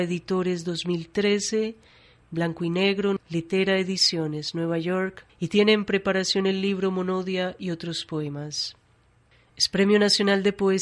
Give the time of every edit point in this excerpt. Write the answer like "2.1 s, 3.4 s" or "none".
3.2 s, 5.3 s